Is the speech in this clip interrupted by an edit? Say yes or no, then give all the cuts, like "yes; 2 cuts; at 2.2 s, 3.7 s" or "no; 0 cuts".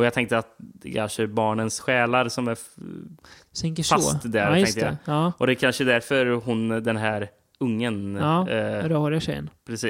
no; 0 cuts